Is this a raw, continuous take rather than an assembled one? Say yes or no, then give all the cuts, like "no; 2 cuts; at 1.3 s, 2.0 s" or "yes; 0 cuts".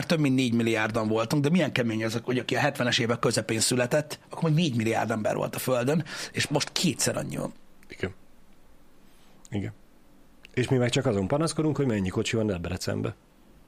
yes; 0 cuts